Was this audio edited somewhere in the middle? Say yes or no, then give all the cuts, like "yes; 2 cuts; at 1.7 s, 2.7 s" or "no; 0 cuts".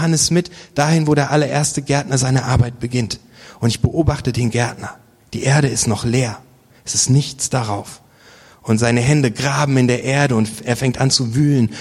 no; 0 cuts